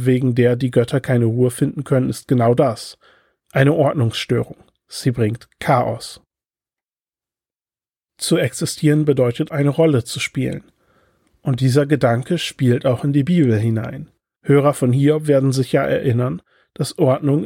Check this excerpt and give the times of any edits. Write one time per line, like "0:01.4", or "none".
0:09.5
0:14.4